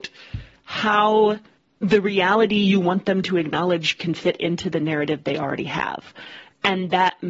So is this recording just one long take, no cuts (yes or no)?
yes